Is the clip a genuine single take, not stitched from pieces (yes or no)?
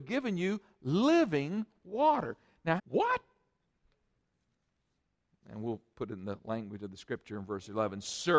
no